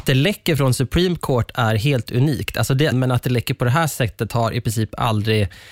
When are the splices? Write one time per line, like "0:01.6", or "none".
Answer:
0:02.9